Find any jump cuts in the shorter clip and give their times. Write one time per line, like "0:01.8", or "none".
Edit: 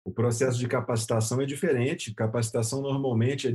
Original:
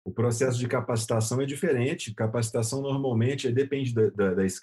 none

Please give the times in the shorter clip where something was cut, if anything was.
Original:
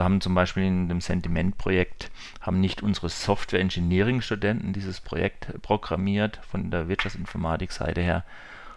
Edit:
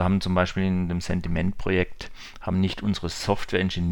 none

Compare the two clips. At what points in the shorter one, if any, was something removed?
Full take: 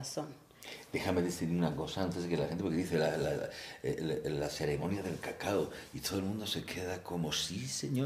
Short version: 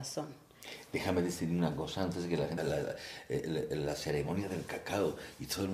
0:02.6

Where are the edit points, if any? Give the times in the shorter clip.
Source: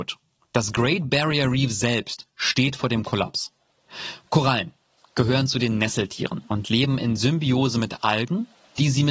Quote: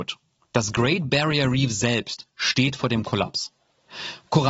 none

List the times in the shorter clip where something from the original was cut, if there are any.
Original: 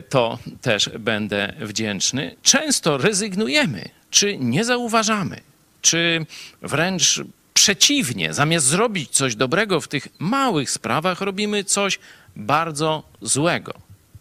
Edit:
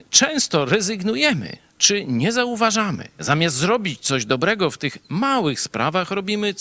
0:03.2

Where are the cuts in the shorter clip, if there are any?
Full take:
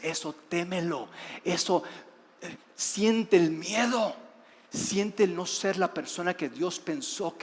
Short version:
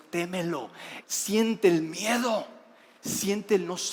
0:01.0

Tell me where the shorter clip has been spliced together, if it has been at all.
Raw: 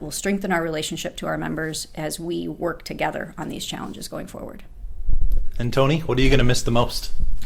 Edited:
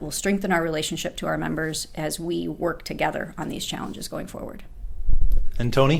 none

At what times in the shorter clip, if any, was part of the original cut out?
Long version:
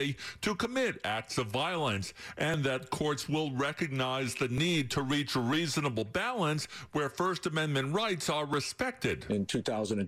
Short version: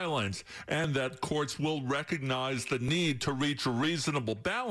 none

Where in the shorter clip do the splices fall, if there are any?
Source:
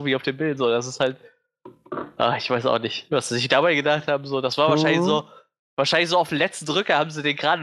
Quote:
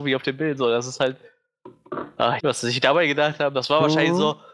0:02.4
0:03.5

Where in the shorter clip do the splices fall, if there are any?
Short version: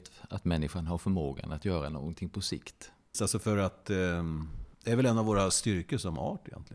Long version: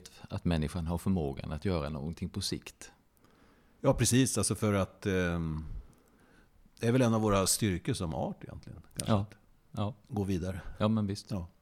0:03.1
0:04.7

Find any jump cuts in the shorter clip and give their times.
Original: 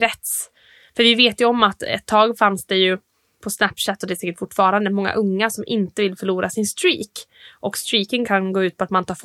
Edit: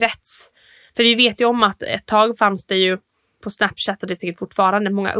none

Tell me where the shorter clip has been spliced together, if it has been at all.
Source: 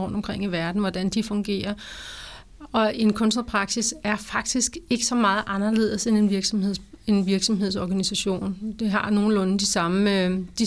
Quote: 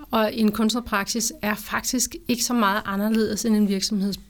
none

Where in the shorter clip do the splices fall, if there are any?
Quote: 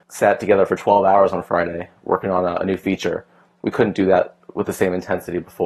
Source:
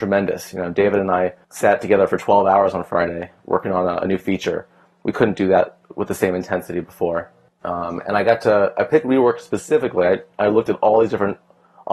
none

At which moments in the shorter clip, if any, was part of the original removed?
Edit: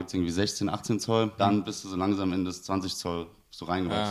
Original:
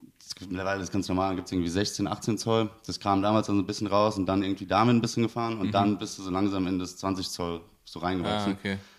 0:01.4

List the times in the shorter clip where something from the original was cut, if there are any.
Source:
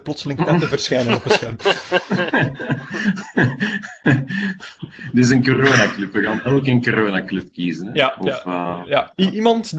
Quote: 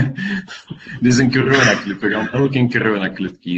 none

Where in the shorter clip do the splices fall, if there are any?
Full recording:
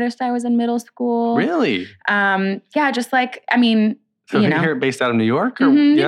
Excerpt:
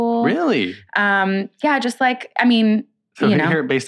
none

